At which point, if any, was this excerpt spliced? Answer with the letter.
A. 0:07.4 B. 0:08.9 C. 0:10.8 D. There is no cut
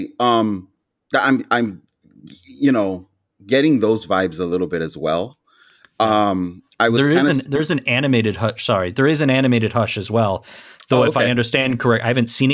D